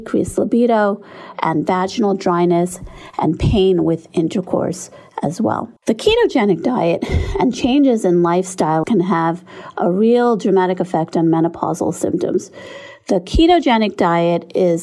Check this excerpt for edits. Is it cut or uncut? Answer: cut